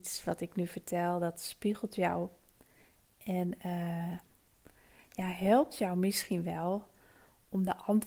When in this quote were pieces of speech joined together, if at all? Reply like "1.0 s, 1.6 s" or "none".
none